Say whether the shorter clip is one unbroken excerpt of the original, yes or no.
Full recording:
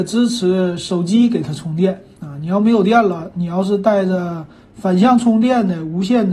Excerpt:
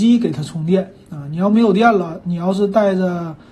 yes